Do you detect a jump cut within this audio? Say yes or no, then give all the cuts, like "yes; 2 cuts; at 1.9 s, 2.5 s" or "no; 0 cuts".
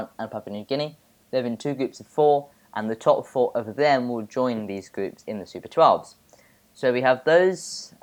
no; 0 cuts